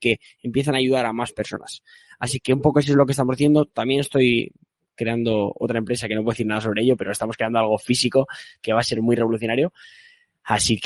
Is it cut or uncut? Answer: uncut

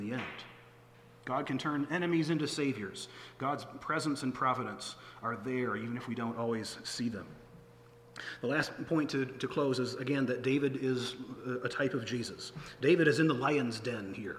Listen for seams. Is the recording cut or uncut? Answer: cut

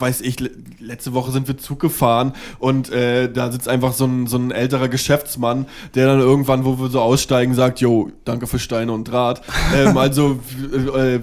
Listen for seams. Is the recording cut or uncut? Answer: cut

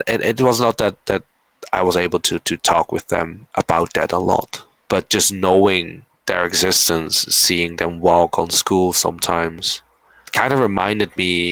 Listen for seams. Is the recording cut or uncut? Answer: uncut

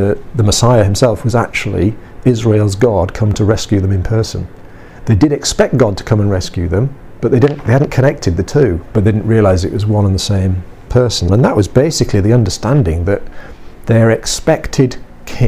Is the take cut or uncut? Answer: cut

